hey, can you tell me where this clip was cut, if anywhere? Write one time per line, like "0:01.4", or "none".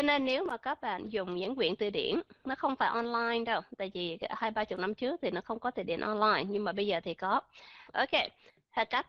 0:07.9